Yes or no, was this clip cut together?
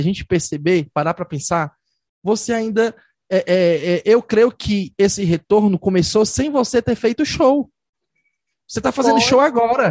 no